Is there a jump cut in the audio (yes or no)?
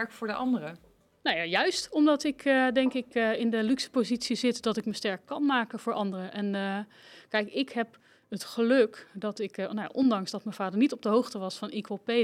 no